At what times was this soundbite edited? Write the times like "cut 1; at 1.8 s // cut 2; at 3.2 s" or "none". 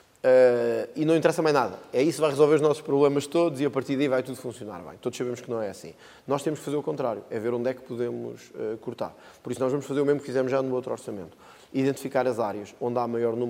none